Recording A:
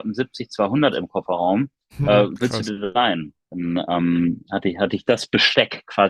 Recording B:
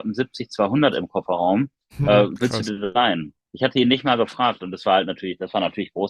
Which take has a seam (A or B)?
A